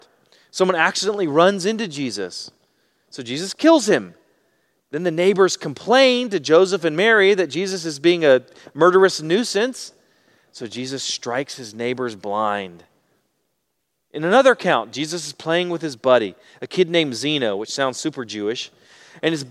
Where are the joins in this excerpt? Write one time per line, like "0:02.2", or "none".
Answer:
none